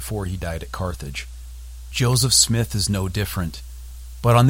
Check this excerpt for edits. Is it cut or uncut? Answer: cut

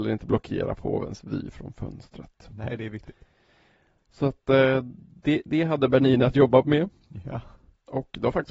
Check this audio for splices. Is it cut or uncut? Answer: uncut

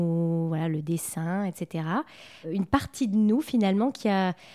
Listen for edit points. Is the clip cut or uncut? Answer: uncut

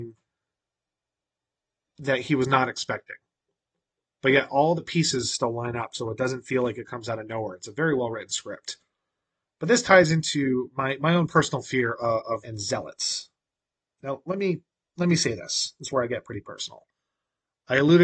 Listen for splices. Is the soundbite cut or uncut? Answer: cut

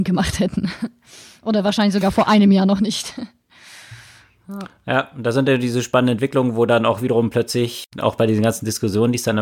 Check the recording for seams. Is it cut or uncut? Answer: uncut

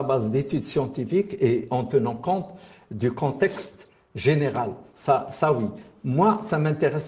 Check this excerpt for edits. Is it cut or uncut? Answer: uncut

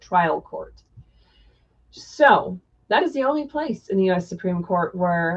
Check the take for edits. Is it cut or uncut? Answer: uncut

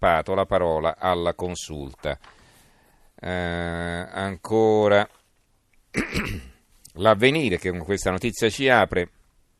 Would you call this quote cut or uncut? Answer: uncut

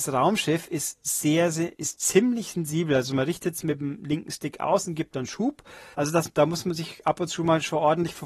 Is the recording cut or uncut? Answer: cut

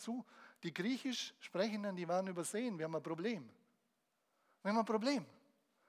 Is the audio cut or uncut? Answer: uncut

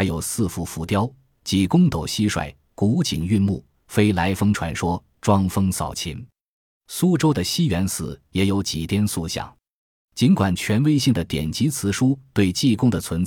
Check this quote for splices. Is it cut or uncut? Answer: uncut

